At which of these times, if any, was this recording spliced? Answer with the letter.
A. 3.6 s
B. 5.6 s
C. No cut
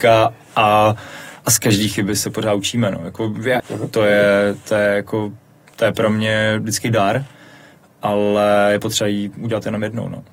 A